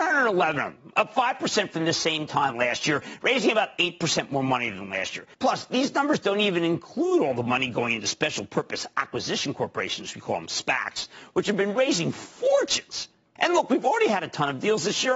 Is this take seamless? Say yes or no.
no